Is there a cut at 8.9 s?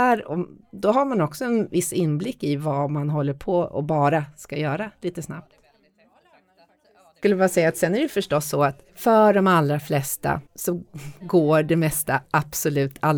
yes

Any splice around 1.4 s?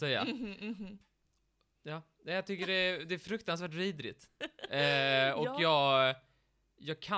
no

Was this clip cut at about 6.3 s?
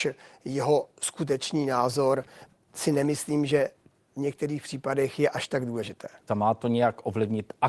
yes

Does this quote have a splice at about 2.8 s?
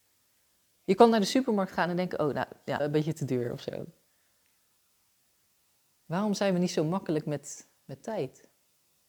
yes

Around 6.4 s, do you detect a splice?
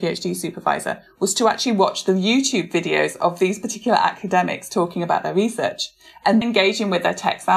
yes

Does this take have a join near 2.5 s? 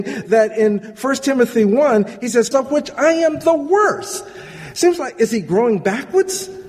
yes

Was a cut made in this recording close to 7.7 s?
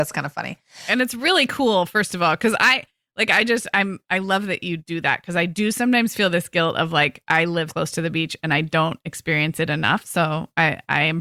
yes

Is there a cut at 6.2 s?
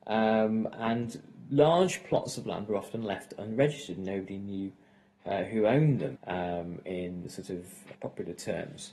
yes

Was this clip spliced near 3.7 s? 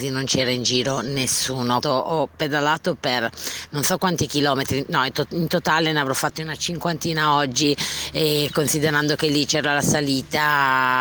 no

